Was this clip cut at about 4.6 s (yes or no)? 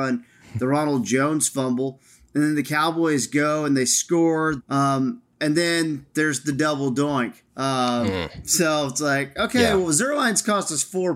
yes